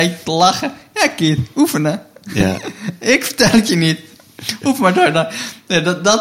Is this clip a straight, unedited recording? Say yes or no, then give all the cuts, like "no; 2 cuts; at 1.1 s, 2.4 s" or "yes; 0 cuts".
yes; 0 cuts